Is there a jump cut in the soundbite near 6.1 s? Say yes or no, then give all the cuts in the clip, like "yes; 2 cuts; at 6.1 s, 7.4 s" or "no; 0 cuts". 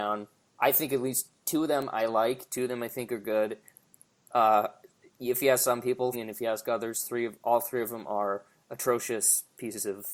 yes; 1 cut; at 6.1 s